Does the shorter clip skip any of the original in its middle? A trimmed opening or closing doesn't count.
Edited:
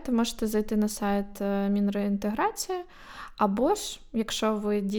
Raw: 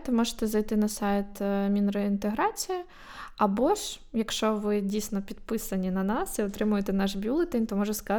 no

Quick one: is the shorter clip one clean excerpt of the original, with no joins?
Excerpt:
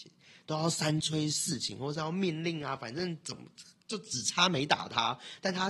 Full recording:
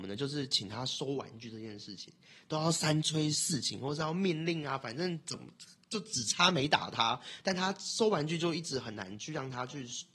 yes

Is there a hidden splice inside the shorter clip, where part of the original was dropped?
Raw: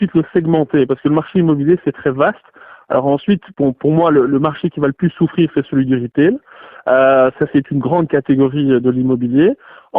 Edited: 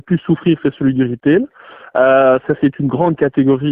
no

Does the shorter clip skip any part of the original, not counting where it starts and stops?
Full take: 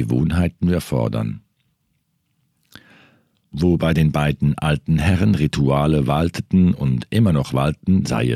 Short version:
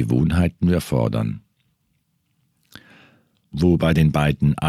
no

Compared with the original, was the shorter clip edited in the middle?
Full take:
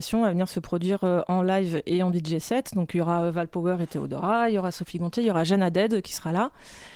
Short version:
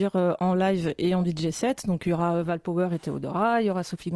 no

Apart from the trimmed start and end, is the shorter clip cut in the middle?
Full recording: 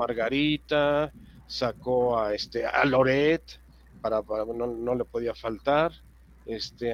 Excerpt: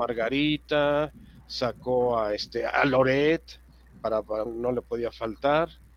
yes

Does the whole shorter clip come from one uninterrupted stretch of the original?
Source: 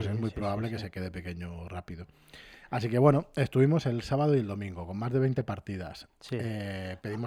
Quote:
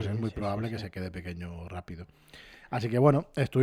yes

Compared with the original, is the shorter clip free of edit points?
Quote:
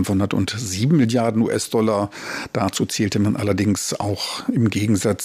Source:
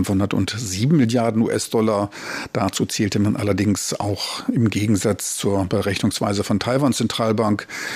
yes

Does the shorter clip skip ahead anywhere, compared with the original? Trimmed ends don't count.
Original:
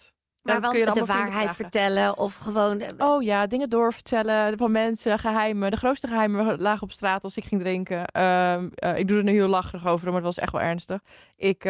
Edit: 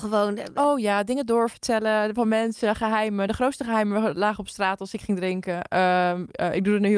no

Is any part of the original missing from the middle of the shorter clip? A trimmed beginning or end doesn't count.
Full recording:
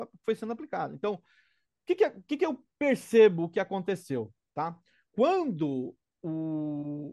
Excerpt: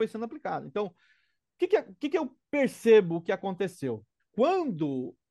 yes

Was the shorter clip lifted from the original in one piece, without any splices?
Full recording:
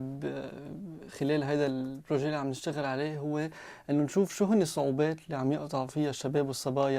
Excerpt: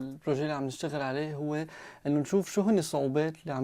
yes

